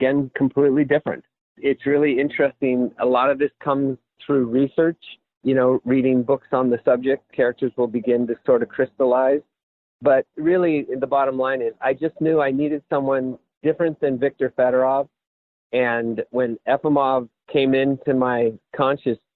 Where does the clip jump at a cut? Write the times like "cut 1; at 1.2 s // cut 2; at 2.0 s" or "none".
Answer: none